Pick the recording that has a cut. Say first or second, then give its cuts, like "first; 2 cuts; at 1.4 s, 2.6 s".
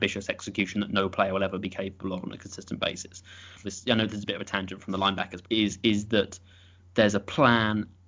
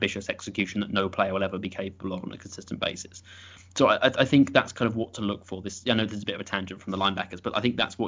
first; 2 cuts; at 3.6 s, 5.4 s